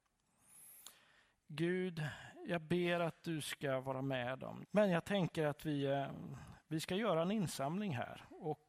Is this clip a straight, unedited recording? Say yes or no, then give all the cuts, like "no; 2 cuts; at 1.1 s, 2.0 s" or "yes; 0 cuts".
no; 1 cut; at 4.6 s